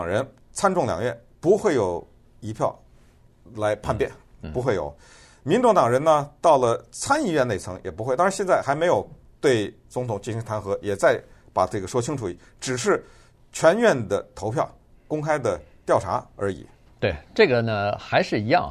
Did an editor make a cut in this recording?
no; 0 cuts

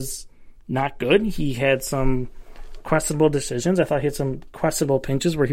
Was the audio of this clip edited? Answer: no; 0 cuts

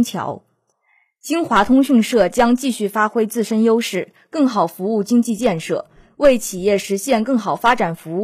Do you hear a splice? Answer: no; 0 cuts

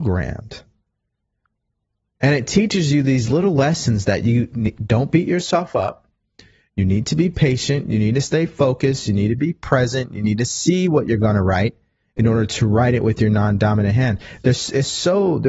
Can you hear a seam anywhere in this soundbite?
no; 0 cuts

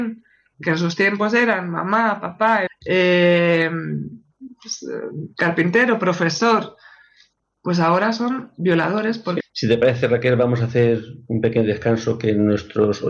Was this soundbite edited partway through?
yes; 2 cuts; at 2.7 s, 9.4 s

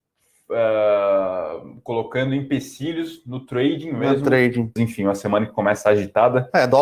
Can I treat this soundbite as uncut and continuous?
no; 1 cut; at 4.8 s

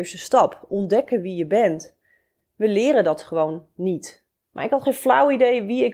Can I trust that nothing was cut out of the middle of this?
no; 1 cut; at 4.5 s

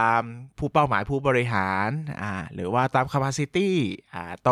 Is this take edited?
yes; 1 cut; at 2.9 s

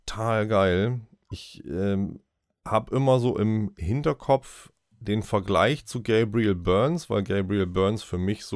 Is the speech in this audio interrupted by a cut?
no; 0 cuts

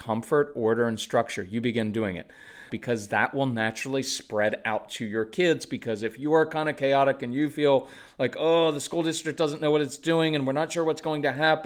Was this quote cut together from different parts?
yes; 1 cut; at 2.7 s

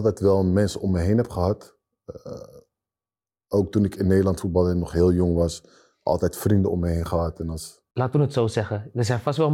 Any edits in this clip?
no; 0 cuts

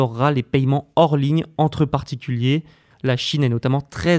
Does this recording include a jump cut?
yes; 1 cut; at 2.9 s

